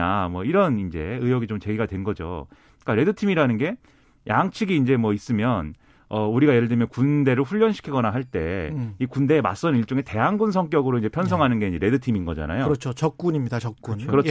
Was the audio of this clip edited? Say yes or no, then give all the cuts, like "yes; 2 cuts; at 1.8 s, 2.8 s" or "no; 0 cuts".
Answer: no; 0 cuts